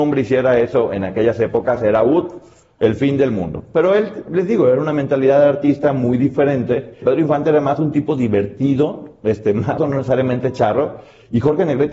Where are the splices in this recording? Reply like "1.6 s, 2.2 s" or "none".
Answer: 7.0 s, 9.8 s